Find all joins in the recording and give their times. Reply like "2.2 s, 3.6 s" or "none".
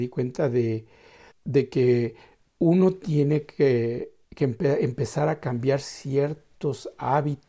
1.3 s, 4.2 s